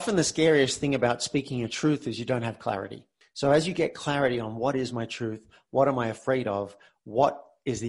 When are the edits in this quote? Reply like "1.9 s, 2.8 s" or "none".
none